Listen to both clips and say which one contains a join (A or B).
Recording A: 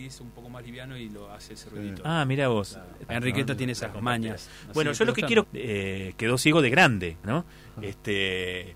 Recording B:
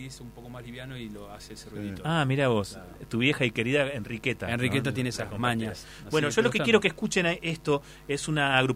A